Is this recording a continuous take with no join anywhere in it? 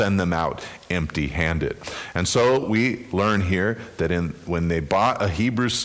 yes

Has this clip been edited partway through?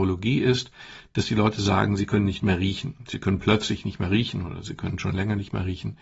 no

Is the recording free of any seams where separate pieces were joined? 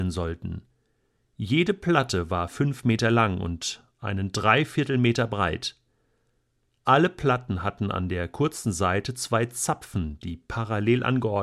yes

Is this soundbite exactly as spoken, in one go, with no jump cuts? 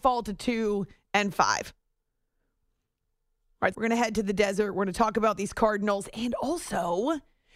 no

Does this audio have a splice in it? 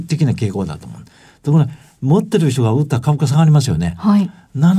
no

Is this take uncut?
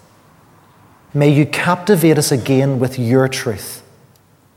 no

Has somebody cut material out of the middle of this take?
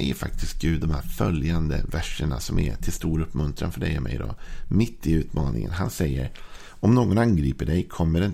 no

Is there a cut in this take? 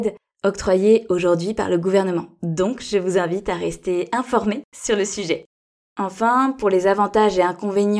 no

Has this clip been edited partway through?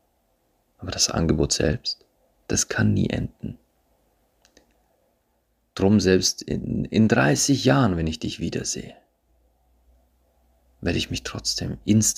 yes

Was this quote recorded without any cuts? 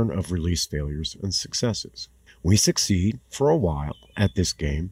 yes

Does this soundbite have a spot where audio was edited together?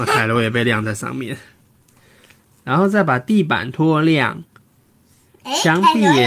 no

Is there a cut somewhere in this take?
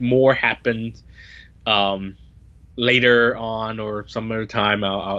no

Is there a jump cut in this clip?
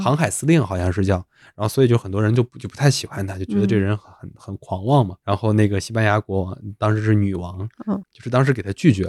yes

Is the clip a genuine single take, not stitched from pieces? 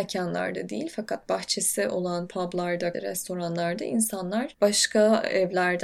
no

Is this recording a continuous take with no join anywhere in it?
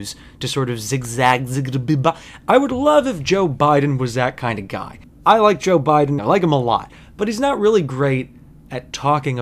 no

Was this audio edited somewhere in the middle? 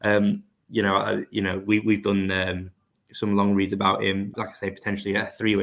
yes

